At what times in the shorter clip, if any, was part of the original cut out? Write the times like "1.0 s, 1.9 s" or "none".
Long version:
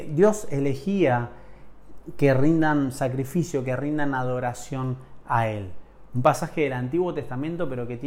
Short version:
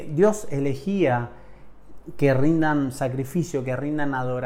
none